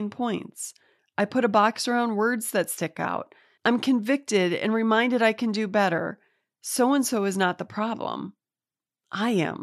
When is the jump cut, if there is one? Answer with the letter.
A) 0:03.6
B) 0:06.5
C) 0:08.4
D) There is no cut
A